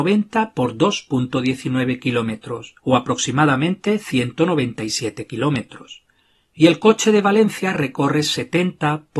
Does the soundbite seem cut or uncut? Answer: cut